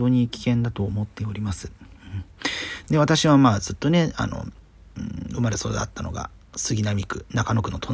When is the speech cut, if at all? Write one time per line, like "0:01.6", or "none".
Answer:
0:02.8